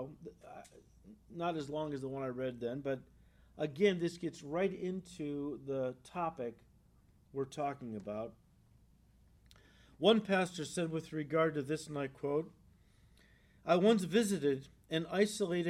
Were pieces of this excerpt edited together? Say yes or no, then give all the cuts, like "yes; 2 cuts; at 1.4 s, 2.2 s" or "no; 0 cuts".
no; 0 cuts